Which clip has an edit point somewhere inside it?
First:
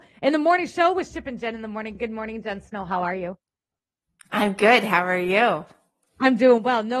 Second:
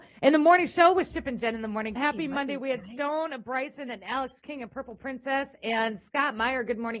second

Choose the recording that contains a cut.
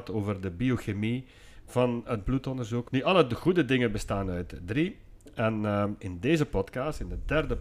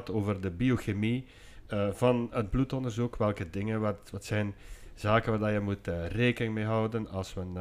first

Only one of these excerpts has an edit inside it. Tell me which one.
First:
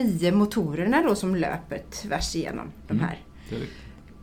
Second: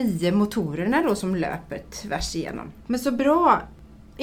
second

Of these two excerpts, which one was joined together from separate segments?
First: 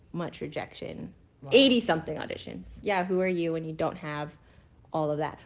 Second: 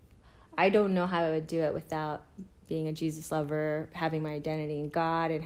first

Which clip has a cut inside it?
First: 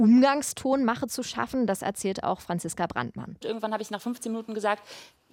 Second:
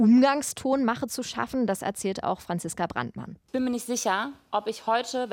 first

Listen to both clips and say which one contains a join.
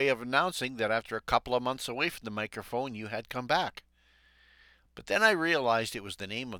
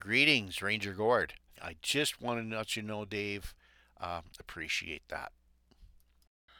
second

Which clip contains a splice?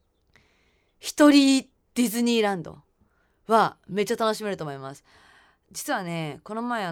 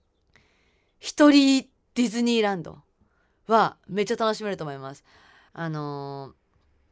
second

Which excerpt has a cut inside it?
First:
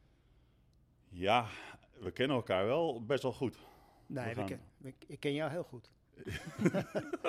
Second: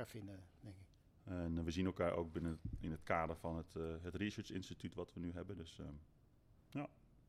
second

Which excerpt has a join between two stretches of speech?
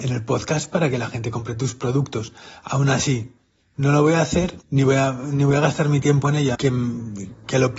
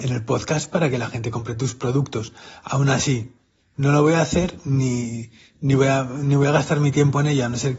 first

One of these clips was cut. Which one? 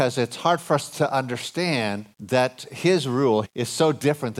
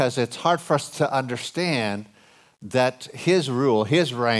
first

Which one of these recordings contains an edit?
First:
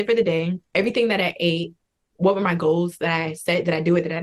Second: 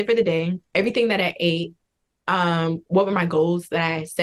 first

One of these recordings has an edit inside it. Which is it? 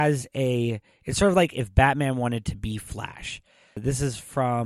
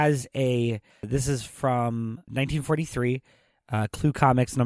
second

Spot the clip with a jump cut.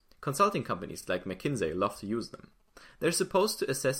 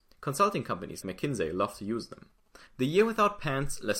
second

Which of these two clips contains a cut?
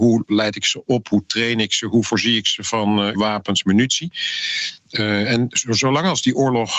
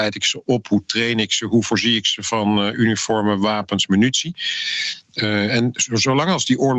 first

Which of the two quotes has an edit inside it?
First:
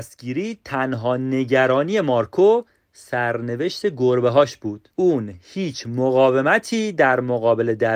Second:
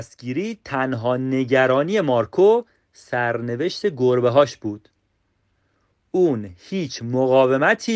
first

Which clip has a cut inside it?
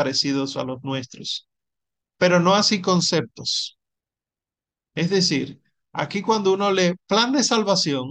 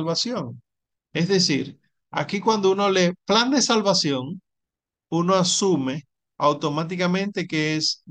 second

